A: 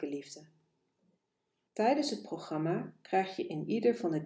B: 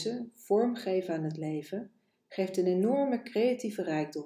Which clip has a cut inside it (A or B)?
A